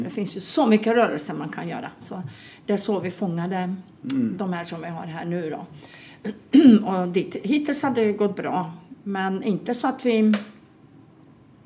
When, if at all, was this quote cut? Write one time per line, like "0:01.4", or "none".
0:02.0